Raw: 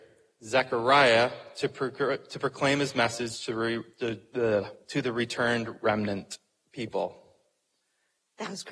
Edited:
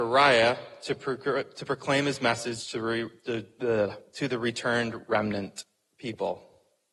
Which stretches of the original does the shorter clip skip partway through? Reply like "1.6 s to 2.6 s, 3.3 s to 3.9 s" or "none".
none